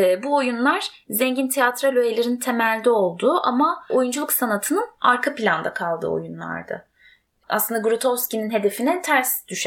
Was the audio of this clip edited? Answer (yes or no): yes